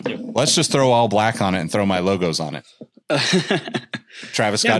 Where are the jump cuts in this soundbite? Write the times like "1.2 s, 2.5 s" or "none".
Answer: none